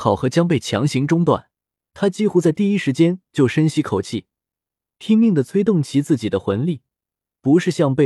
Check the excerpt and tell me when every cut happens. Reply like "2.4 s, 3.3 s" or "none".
1.9 s

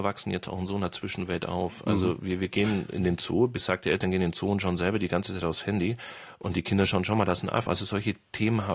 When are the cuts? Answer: 7.7 s

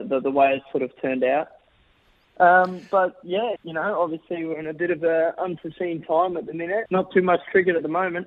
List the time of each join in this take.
3.6 s, 6.8 s

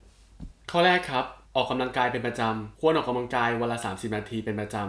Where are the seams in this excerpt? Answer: 1.5 s, 2.7 s

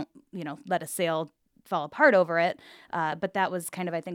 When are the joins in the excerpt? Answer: none

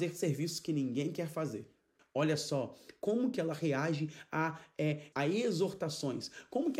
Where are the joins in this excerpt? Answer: 2.0 s, 5.1 s

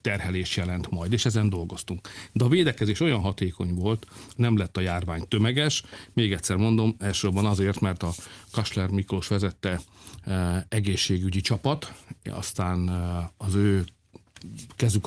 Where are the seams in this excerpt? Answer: 4.3 s

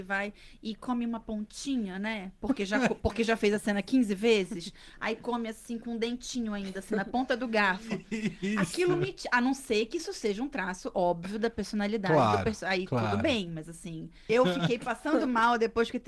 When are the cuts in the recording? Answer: 14.3 s

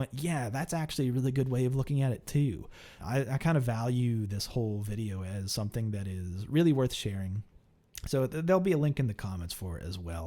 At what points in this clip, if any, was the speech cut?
3.0 s

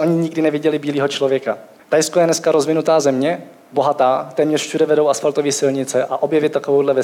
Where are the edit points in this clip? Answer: 1.8 s

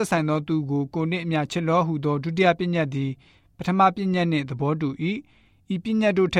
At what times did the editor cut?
none

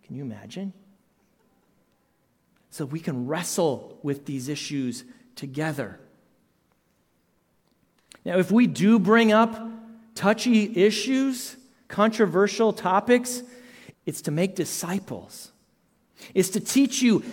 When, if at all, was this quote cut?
13.9 s

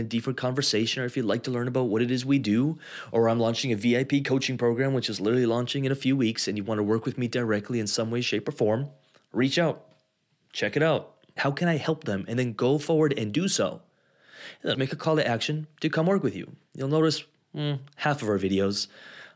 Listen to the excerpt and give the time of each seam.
11.4 s, 14.7 s

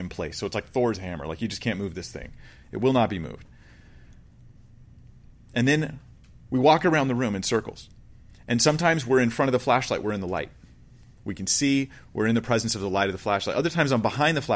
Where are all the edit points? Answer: none

